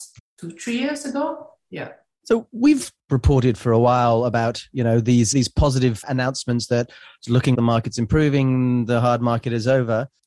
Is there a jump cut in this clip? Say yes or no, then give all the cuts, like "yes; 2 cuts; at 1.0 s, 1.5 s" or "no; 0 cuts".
yes; 2 cuts; at 5.3 s, 7.5 s